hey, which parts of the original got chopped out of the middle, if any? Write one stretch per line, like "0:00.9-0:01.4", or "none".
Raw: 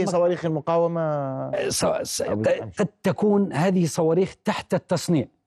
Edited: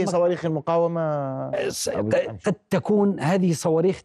0:01.7-0:02.0